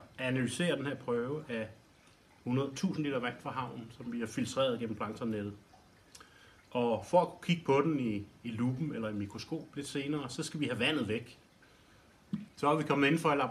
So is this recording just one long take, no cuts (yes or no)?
no